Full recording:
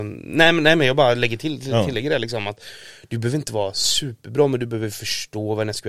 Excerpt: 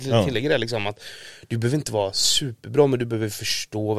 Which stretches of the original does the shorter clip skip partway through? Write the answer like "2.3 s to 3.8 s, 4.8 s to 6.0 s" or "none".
none